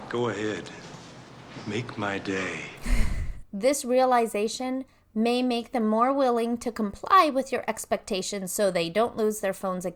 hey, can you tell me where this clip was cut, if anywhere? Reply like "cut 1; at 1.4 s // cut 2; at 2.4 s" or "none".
cut 1; at 3.4 s